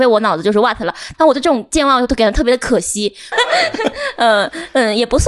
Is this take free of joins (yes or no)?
no